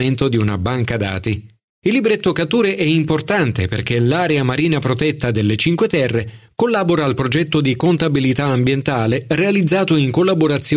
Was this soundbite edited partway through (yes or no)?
yes